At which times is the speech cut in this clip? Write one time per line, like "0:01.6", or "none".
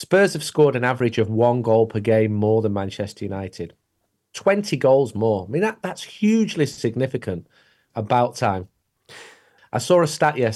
0:07.9
0:09.6